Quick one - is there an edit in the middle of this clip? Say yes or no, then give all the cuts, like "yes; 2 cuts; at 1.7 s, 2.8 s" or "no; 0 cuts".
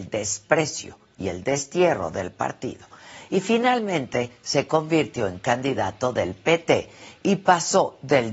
no; 0 cuts